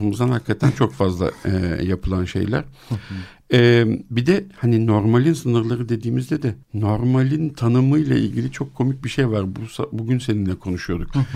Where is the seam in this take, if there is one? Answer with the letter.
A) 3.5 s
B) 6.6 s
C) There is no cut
B